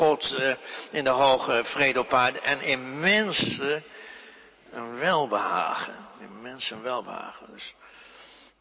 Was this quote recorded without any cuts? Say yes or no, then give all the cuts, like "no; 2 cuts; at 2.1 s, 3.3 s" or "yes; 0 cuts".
yes; 0 cuts